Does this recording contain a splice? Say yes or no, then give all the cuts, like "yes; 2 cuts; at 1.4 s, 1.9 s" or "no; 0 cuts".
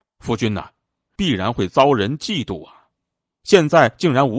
yes; 1 cut; at 1.1 s